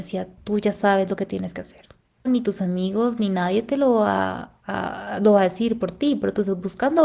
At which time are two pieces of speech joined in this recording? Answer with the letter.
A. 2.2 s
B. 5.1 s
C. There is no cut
A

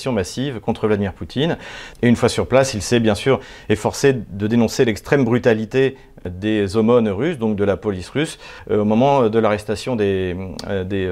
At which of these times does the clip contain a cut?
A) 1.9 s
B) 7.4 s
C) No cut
A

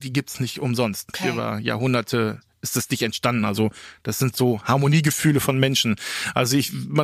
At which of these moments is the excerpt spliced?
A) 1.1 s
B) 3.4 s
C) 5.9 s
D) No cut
A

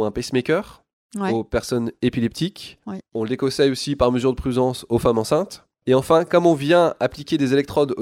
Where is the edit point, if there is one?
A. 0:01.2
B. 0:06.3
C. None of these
C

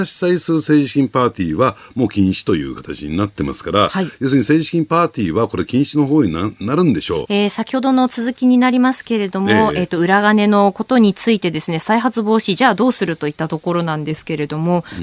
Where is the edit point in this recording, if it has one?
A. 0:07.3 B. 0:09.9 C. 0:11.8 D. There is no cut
A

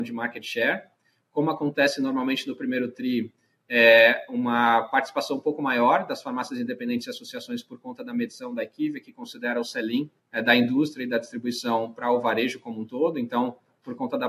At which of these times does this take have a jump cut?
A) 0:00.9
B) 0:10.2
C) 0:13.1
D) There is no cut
B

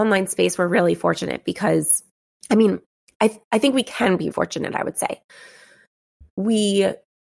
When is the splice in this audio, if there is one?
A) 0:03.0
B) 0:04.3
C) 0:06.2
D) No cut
B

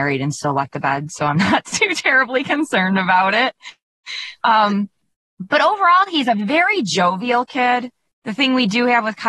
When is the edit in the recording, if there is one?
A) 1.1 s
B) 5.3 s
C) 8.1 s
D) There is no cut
C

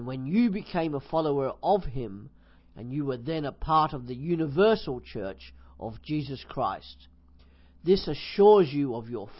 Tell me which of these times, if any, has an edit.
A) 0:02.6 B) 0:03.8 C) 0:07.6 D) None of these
A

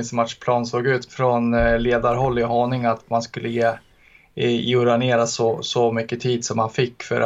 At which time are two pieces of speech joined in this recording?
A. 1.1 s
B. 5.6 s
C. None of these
A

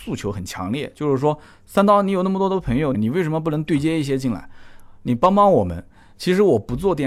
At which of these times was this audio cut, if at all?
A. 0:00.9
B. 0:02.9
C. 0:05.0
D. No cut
B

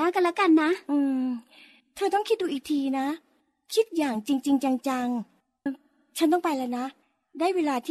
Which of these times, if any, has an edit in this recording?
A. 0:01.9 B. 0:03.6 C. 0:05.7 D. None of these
C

